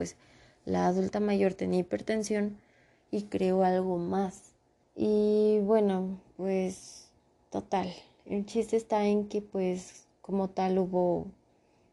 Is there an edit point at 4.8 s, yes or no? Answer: yes